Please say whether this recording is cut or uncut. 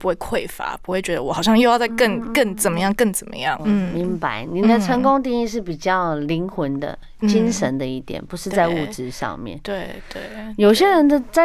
cut